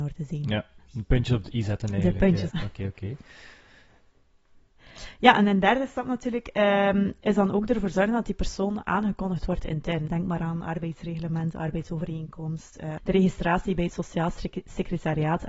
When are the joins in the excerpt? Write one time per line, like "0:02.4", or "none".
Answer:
0:02.5
0:10.1
0:13.0